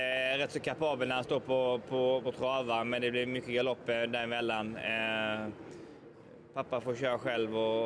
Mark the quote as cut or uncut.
cut